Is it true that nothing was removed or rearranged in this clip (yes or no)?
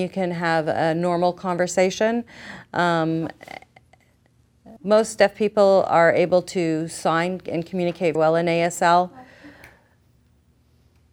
no